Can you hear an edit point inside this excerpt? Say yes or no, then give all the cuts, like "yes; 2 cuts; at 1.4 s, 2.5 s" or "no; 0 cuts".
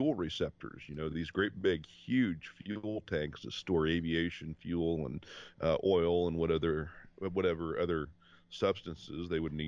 no; 0 cuts